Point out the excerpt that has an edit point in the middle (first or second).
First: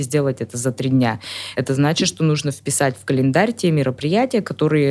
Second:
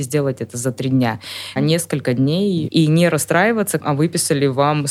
second